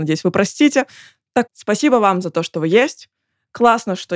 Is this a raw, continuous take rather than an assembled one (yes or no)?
no